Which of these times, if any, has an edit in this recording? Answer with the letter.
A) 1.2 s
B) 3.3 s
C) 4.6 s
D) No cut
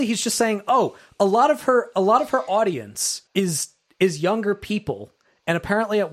B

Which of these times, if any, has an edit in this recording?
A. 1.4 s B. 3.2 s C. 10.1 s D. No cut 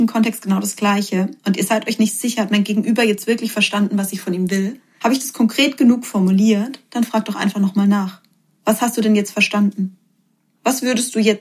D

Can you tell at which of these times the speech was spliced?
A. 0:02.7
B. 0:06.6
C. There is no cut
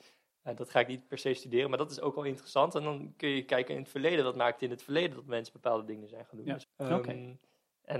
B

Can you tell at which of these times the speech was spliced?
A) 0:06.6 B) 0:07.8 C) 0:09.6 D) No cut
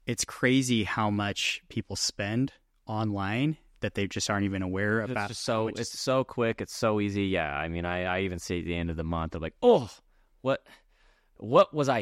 D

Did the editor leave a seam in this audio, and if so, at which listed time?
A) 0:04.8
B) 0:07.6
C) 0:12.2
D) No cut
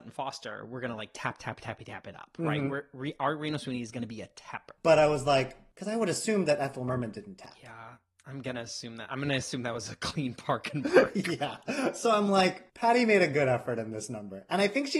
A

